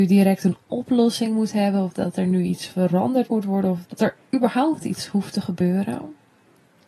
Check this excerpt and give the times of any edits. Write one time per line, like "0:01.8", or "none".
0:03.8